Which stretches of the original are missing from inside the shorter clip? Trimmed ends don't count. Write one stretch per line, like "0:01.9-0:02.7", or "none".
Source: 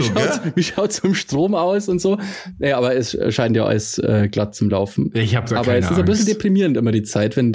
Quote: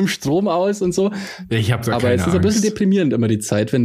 0:02.6-0:05.1